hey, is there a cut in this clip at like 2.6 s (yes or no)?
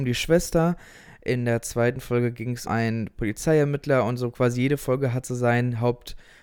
yes